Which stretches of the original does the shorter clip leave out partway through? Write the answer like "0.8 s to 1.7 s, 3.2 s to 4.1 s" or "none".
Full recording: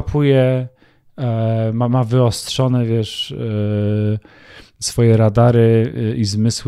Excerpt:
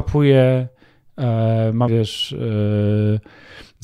1.9 s to 2.9 s